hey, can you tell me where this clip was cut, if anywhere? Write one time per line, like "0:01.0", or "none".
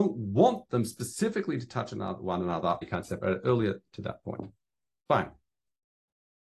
0:02.8